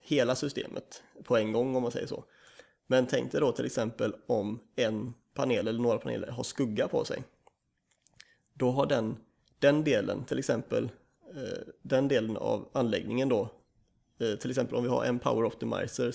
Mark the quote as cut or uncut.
uncut